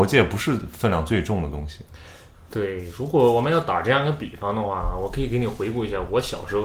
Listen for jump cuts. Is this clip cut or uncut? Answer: uncut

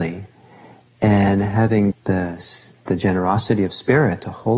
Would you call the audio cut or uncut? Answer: cut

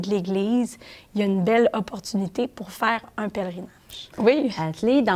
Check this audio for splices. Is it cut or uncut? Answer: cut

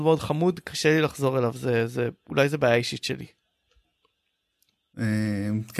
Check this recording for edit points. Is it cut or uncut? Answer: uncut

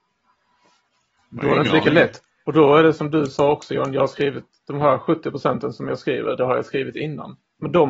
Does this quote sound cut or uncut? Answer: uncut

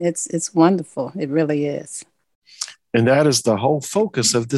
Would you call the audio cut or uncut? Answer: uncut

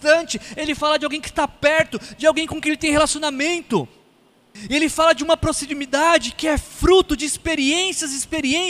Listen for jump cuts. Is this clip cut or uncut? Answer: uncut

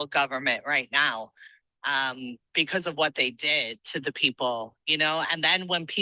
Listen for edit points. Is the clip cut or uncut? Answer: uncut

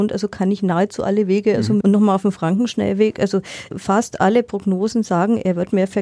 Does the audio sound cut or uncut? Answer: cut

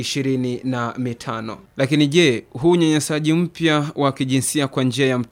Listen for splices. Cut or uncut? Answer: cut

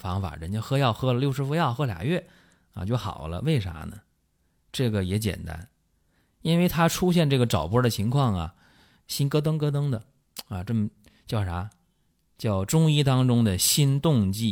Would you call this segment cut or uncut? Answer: uncut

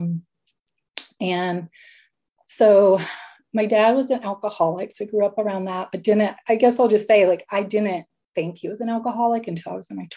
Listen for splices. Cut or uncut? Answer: uncut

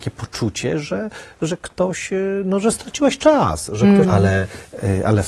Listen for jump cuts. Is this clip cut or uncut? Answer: cut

